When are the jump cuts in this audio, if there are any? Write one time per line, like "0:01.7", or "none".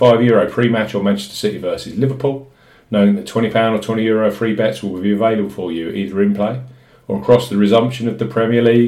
none